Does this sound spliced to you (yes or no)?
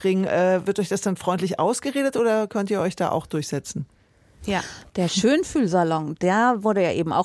yes